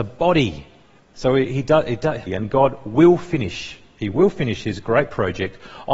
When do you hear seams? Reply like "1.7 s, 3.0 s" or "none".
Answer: 1.0 s, 2.3 s